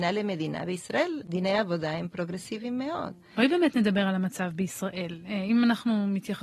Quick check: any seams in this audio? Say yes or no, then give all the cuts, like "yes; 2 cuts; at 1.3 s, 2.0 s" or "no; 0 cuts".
no; 0 cuts